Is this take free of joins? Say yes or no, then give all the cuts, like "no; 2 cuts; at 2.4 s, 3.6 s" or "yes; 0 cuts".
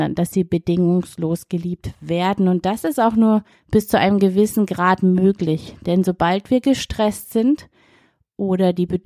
yes; 0 cuts